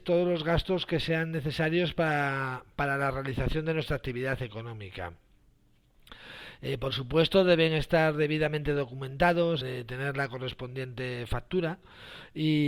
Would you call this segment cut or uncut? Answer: cut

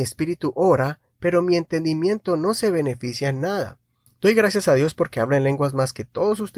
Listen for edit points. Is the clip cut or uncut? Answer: cut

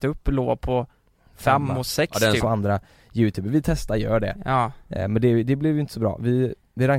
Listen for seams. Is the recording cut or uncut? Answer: cut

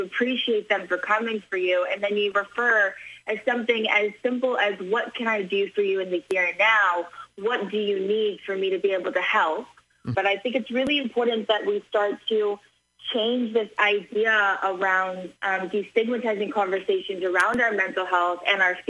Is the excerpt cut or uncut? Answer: cut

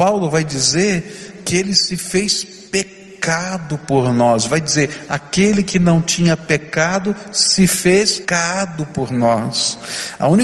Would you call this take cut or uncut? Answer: cut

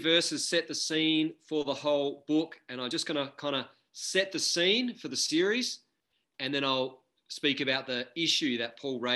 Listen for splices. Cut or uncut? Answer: uncut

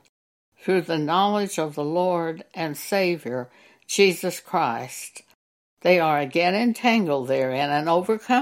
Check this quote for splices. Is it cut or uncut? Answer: uncut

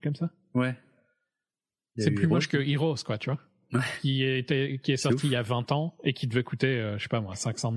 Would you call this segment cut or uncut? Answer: uncut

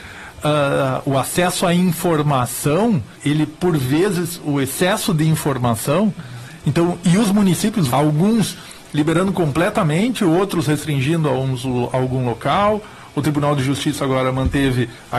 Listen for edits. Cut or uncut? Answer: cut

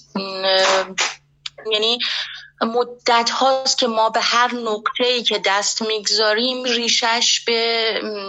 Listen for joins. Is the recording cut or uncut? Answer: cut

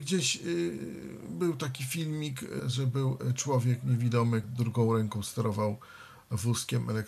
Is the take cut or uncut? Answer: cut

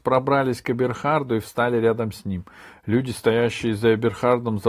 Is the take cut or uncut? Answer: uncut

